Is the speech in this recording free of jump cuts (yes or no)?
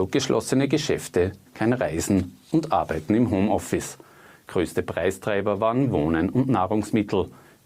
no